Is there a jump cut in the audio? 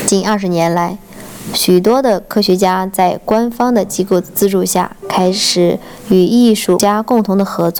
no; 0 cuts

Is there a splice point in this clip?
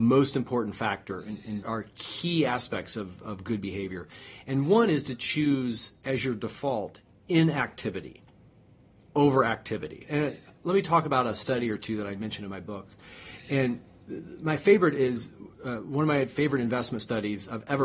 yes; 3 cuts; at 1.6 s, 10.0 s, 15.5 s

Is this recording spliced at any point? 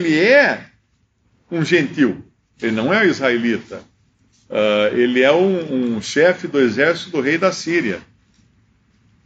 yes; 1 cut; at 2.5 s

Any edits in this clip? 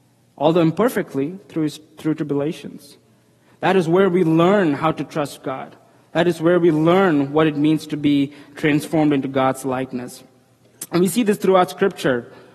no; 0 cuts

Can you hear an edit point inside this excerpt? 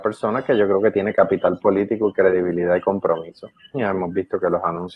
yes; 1 cut; at 3.7 s

